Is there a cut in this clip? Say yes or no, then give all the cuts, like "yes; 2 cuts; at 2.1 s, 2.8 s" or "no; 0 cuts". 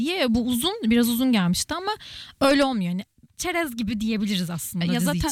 no; 0 cuts